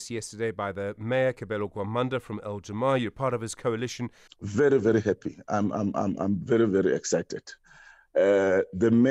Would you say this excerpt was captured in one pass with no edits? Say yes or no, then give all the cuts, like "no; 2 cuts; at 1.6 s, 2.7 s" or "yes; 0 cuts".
no; 1 cut; at 4.3 s